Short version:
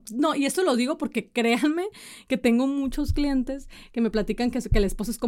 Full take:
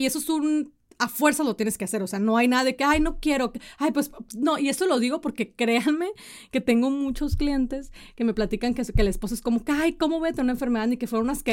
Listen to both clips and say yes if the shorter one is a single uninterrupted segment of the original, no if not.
yes